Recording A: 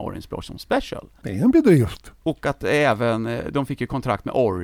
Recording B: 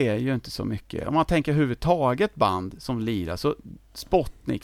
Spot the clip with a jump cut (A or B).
A